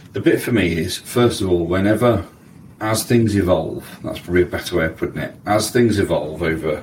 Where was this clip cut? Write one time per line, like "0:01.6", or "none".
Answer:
0:02.8